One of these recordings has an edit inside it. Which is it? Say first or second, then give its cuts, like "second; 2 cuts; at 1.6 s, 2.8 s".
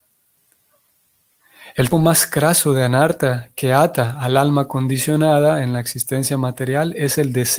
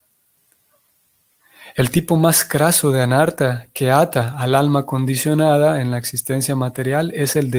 first; 1 cut; at 1.9 s